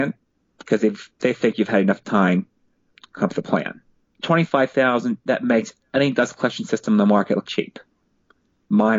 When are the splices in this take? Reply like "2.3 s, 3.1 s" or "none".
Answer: 4.1 s, 7.5 s